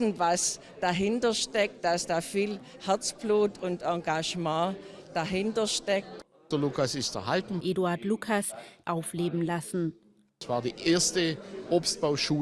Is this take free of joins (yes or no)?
no